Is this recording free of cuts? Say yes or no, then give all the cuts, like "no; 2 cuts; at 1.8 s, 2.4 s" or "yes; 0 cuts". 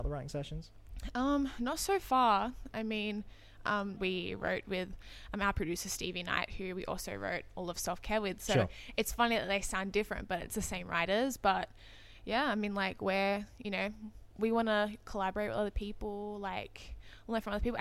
no; 1 cut; at 4.0 s